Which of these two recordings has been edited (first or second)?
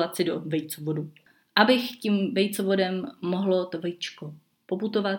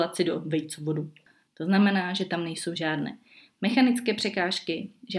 second